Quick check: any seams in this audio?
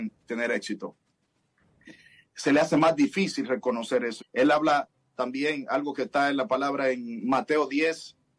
yes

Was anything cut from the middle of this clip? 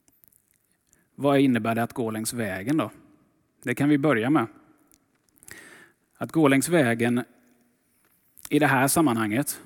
no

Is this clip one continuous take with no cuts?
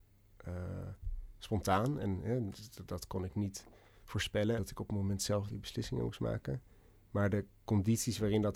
no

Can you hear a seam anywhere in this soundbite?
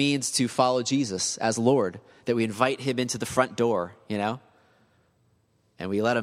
no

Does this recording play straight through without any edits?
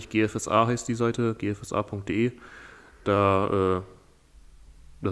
yes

